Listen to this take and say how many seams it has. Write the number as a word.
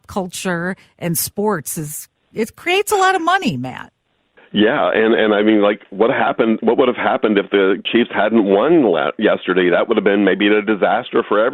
zero